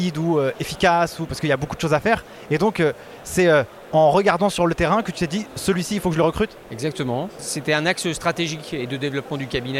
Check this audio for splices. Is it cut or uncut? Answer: uncut